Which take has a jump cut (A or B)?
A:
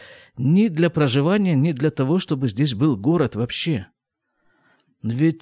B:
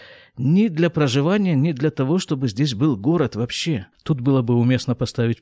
B